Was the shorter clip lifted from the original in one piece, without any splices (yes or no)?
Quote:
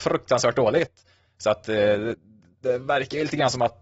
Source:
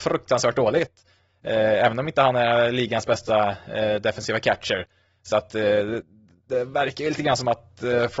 no